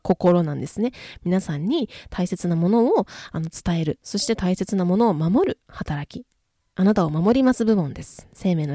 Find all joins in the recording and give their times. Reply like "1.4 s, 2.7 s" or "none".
none